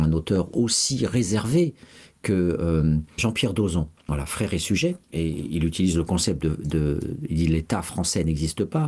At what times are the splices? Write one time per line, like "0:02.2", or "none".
0:03.2